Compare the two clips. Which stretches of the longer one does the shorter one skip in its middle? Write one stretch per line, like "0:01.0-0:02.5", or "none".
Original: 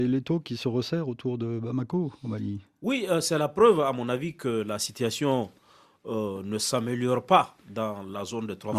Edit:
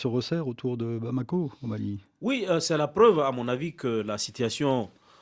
none